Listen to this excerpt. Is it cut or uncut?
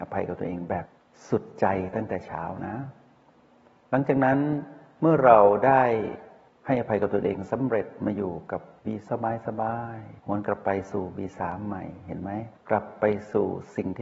cut